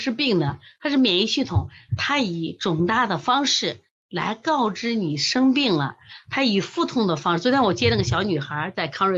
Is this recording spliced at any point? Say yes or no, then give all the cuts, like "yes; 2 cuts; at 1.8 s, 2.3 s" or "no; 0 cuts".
yes; 1 cut; at 1.9 s